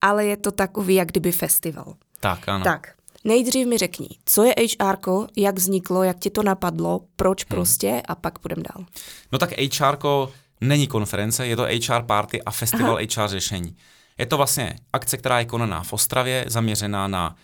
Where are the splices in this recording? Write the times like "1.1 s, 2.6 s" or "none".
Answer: none